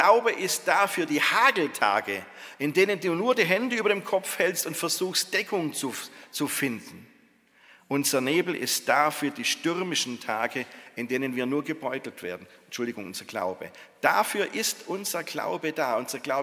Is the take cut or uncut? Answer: uncut